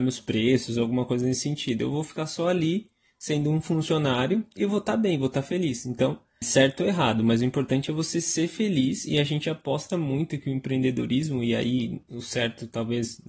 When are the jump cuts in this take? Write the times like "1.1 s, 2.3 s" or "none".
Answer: 6.4 s